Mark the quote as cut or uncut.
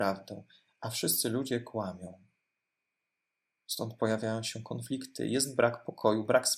uncut